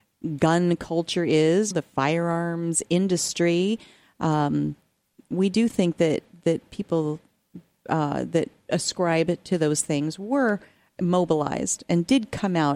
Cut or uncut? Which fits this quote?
cut